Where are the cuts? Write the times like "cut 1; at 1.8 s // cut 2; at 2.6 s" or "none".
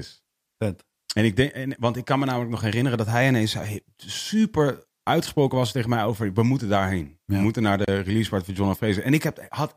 cut 1; at 4.9 s